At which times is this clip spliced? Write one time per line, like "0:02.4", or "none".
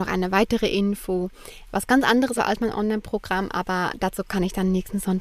0:02.4

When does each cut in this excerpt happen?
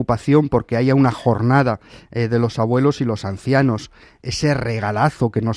none

